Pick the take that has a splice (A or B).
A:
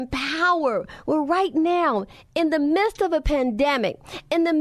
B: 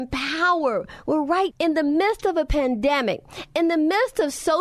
B